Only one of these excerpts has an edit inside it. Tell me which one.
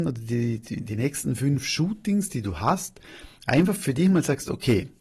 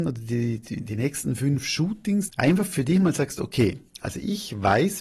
second; 1 cut; at 2.3 s

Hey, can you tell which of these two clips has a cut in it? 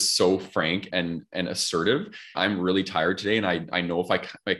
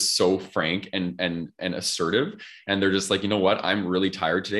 first; 2 cuts; at 0.9 s, 2.3 s

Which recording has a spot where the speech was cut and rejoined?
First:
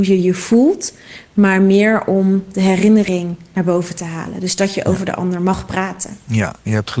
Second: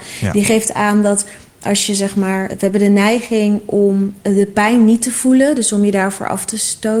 second; 1 cut; at 2.5 s

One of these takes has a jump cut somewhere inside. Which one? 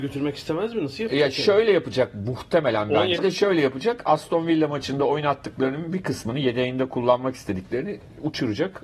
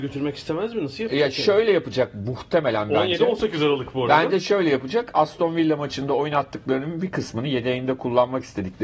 first; 1 cut; at 3.2 s

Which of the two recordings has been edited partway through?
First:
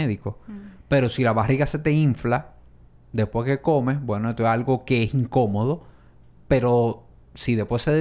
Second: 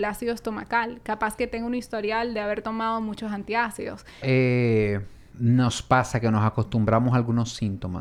second; 1 cut; at 4.2 s

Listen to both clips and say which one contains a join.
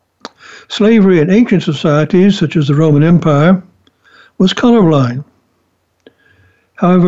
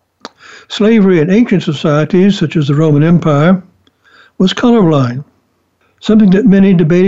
second; 1 cut; at 5.8 s

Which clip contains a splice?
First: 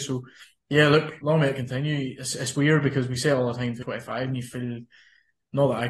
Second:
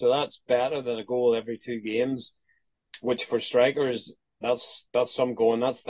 first; 2 cuts; at 1.2 s, 3.8 s

